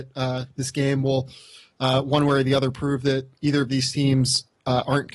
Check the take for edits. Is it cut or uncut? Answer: uncut